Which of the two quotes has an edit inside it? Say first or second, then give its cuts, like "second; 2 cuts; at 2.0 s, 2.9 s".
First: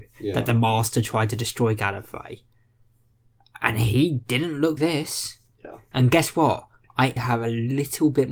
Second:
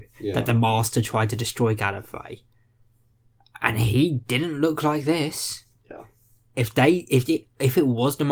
first; 3 cuts; at 4.8 s, 5.9 s, 7.2 s